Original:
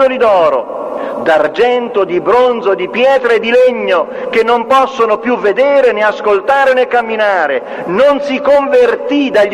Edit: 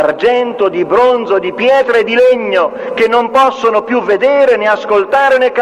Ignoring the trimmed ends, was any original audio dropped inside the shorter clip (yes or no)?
no